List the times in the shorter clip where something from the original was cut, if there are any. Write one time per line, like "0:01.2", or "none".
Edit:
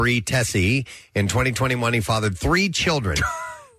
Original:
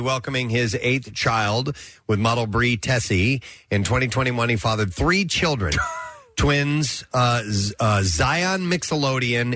none